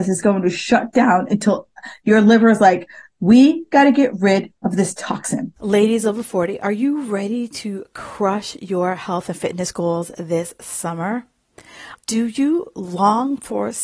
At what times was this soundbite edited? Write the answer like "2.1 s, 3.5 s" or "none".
11.9 s